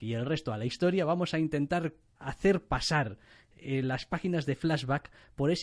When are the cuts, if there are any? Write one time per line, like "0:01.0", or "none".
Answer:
0:02.2

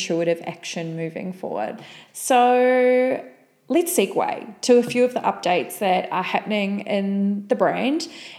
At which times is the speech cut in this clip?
0:02.1

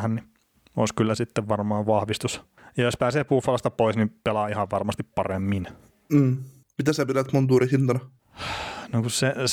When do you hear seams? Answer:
0:06.8

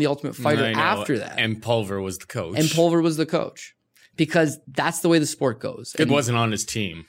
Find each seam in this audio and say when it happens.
0:06.1

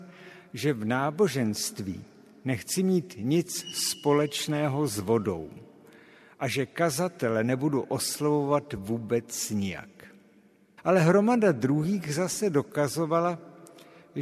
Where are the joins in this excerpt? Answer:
0:10.8

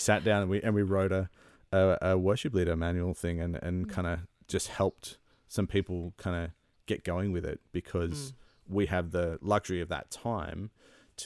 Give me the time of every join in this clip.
none

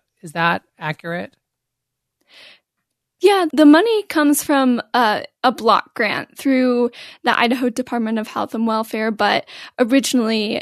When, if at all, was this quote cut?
0:03.5

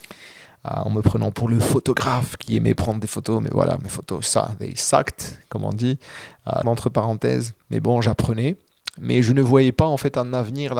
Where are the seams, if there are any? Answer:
0:06.6

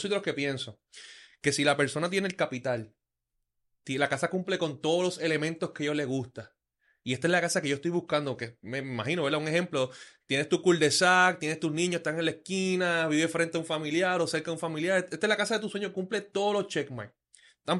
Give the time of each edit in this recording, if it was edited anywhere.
none

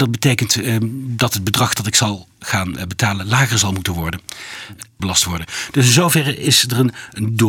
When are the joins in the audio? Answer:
0:05.0

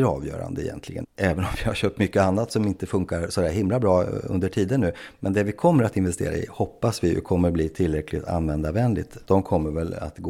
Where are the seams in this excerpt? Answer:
0:01.0
0:09.2

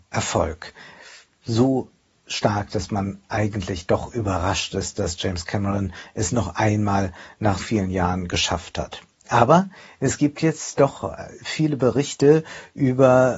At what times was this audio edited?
0:07.6

